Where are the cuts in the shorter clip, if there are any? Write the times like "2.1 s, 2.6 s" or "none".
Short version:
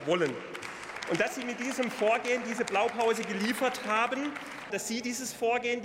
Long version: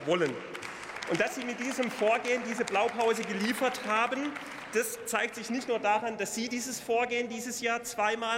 4.7 s